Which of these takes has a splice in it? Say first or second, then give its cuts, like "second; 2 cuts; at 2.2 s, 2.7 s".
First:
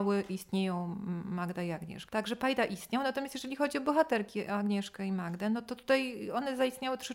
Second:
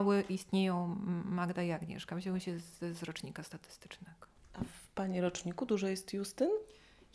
first; 1 cut; at 2.1 s